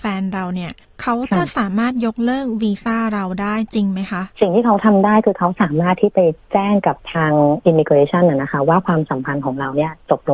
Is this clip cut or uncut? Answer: cut